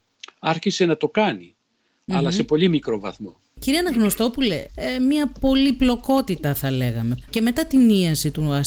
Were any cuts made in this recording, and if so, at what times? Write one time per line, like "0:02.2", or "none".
0:04.7
0:07.2

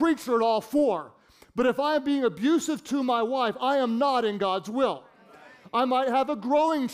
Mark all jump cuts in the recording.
none

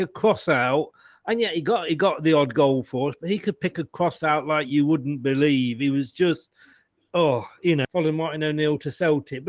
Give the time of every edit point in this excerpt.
0:07.8

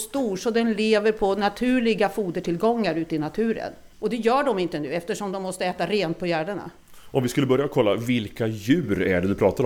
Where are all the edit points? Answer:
0:03.9

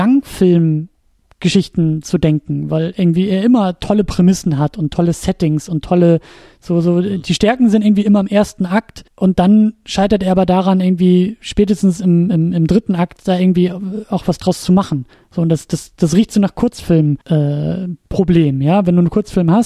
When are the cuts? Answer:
0:09.1
0:17.2

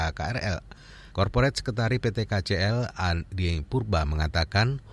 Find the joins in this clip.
0:01.1

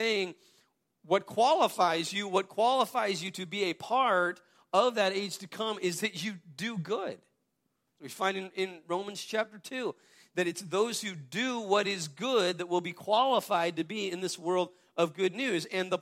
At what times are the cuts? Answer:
none

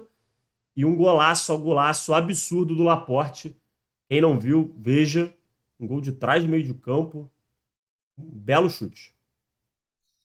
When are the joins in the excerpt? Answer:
none

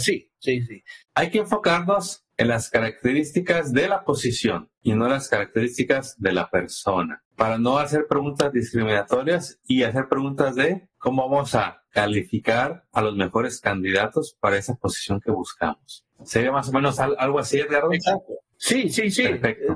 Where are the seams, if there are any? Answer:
0:01.0

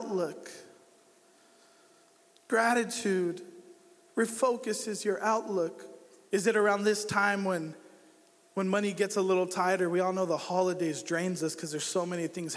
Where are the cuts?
0:06.3

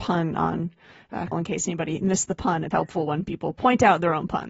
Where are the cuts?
0:01.3
0:02.7

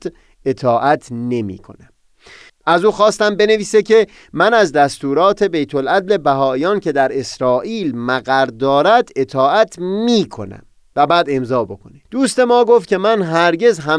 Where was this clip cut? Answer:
0:02.5
0:12.1

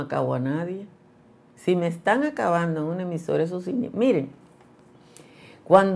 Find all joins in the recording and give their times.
none

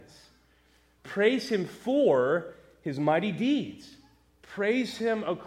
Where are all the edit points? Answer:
none

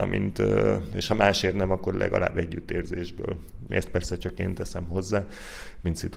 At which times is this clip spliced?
0:03.7

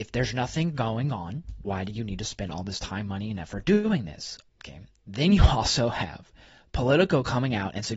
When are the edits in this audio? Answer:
0:01.6
0:04.5

